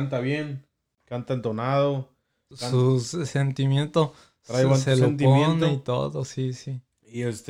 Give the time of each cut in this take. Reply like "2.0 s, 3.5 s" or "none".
none